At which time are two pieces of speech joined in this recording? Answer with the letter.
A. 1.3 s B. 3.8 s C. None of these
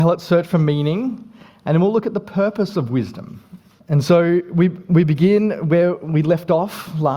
B